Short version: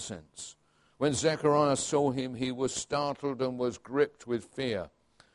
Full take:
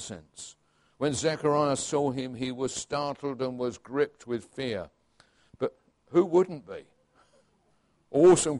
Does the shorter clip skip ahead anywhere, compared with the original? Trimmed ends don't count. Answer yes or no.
no